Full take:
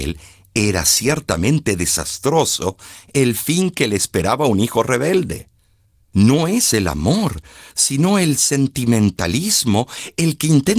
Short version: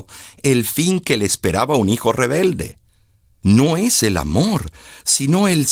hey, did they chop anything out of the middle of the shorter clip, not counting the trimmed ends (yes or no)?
no